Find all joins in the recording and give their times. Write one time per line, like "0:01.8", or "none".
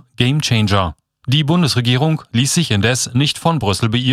0:01.2